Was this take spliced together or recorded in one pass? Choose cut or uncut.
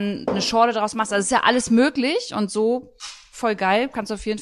uncut